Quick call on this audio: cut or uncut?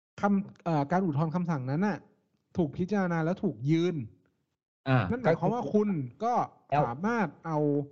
uncut